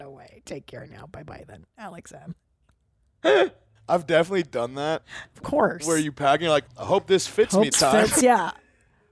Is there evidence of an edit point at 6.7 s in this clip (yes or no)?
yes